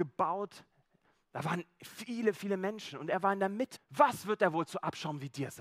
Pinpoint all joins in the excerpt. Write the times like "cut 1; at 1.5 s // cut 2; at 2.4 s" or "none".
cut 1; at 3.8 s